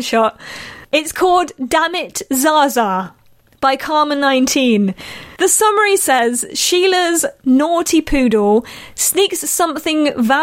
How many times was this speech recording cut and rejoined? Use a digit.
1